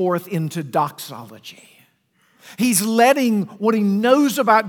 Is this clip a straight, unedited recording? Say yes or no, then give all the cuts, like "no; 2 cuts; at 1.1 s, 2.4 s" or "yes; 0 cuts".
yes; 0 cuts